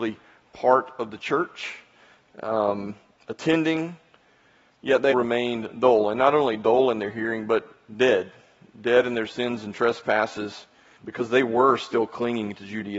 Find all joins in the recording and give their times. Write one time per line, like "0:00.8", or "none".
0:05.1
0:11.0